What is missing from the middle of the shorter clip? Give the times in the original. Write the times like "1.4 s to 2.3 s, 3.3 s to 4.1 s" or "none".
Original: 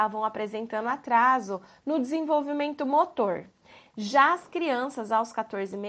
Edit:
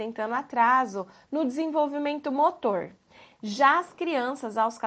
none